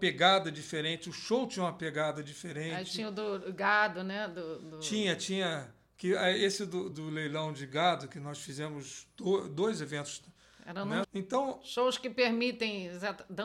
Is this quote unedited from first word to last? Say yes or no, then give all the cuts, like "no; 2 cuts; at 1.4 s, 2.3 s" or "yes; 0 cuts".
no; 2 cuts; at 6.9 s, 11.0 s